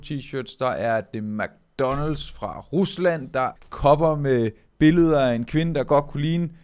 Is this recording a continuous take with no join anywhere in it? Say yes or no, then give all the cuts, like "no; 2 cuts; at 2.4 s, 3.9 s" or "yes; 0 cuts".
no; 1 cut; at 3.6 s